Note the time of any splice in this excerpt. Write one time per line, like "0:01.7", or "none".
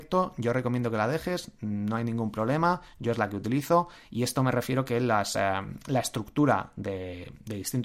none

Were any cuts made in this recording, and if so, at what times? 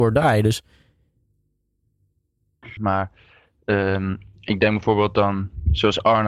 0:02.8

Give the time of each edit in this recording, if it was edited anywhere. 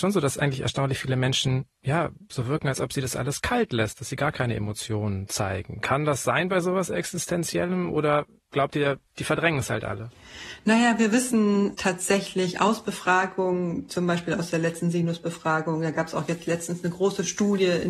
0:09.1

